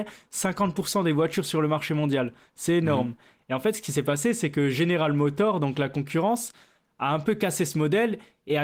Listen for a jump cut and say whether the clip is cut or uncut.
uncut